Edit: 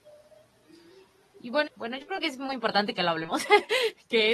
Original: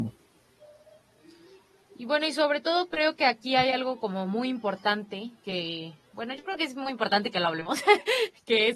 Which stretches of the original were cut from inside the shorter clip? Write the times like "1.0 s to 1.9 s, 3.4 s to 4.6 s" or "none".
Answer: 2.2 s to 6.0 s